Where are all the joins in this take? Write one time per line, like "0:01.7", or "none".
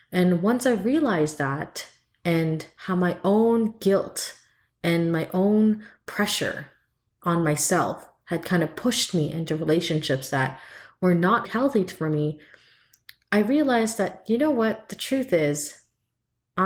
0:11.4